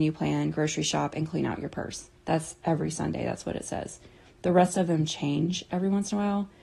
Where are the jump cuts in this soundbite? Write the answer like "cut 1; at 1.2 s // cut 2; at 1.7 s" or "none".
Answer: cut 1; at 2.2 s